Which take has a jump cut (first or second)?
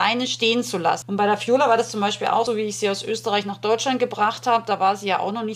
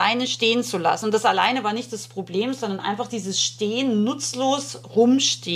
first